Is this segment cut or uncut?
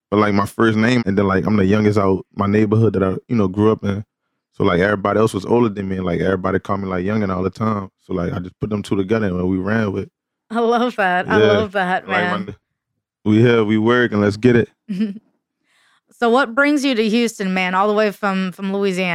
cut